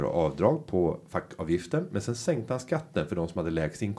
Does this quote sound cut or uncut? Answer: uncut